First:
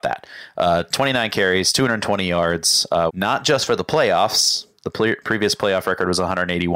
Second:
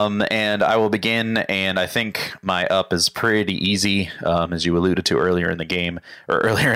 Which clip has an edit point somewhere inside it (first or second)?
first